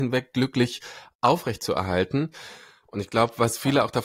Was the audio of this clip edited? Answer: yes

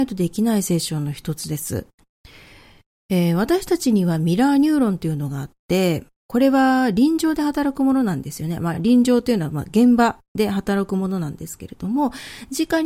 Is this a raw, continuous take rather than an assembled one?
yes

